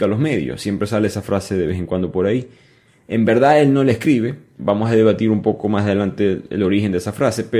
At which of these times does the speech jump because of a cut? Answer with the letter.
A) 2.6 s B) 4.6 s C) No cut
B